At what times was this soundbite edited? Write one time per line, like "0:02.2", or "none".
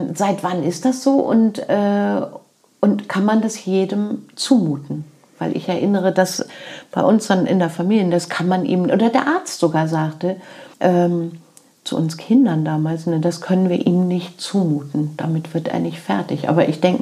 0:10.7